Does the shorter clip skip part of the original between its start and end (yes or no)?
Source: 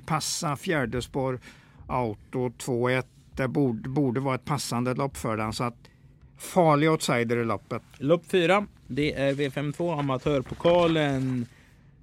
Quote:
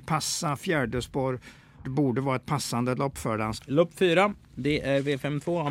yes